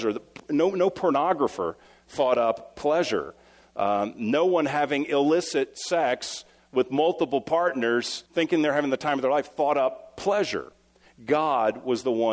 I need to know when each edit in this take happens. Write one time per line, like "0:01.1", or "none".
0:08.3

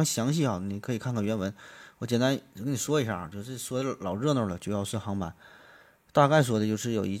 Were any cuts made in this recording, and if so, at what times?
none

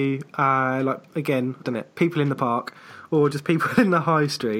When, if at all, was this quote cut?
0:01.6

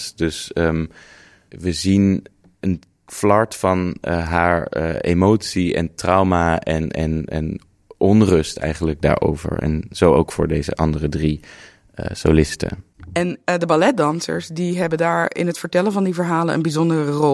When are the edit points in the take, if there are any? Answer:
none

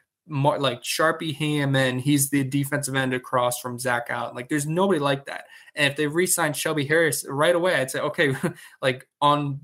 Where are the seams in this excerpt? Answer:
none

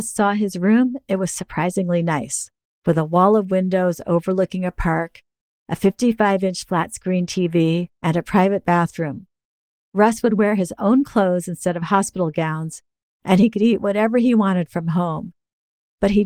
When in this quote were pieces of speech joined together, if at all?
none

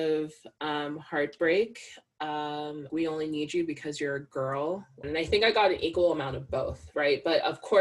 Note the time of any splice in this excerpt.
0:02.9
0:05.0

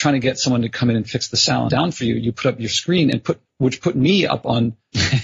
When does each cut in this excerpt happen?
0:01.7

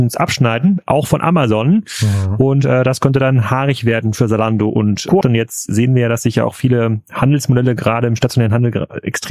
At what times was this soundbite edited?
0:05.2

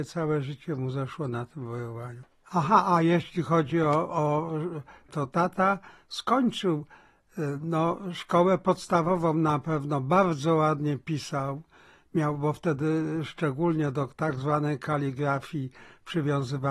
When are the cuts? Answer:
0:05.1

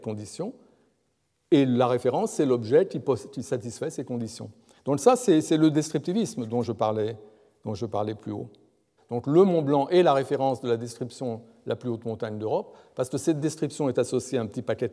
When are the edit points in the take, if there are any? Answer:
0:09.0

